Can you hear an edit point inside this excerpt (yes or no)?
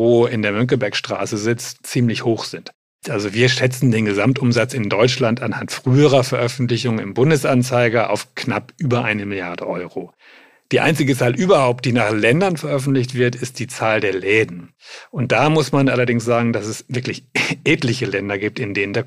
yes